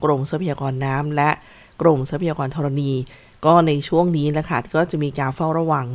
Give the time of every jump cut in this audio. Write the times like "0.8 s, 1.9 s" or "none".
none